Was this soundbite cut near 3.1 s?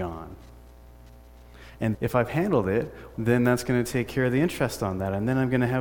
yes; 2 cuts; at 1.9 s, 3.1 s

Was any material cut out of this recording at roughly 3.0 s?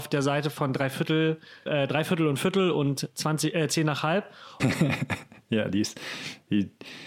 no; 2 cuts; at 1.7 s, 4.6 s

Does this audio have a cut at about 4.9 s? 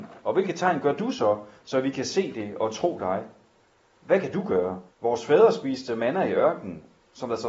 yes; 1 cut; at 4.9 s

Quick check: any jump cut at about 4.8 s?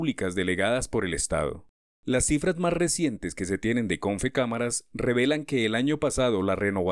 no; 1 cut; at 1.9 s

